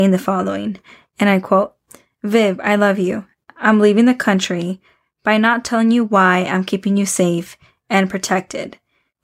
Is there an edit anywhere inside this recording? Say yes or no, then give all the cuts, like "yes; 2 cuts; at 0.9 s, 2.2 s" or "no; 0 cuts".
no; 0 cuts